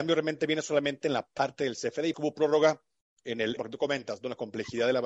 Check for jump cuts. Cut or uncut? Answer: cut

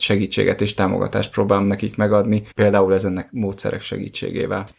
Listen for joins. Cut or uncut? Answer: cut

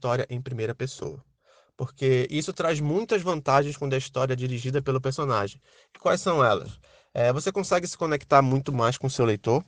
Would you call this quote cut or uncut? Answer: uncut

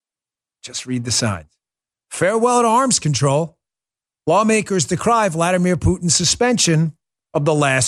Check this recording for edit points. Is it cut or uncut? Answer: uncut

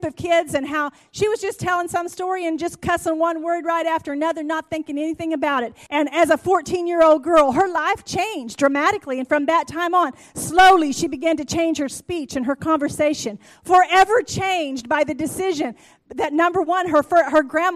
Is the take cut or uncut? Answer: cut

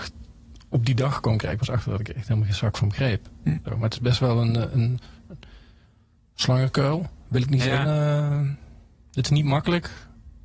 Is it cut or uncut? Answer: cut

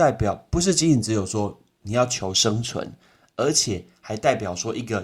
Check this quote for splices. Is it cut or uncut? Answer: uncut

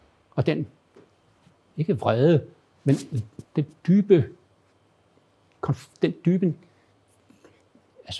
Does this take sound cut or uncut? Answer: uncut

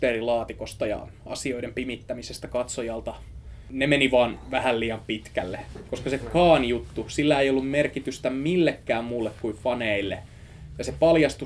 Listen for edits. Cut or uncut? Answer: uncut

